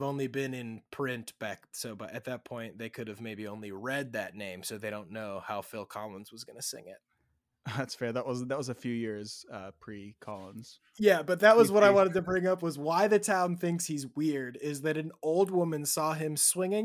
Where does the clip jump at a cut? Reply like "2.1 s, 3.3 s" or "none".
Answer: none